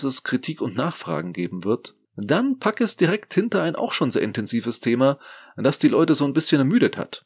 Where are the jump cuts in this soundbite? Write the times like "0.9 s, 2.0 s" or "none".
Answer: 2.0 s